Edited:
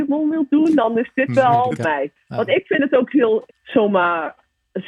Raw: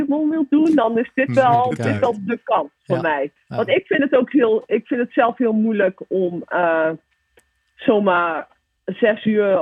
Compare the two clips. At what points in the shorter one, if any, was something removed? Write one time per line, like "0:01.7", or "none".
0:01.8
0:03.5